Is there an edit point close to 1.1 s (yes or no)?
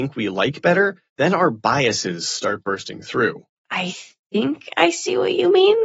yes